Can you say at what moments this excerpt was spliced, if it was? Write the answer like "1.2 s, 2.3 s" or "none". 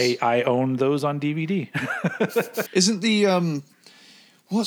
2.7 s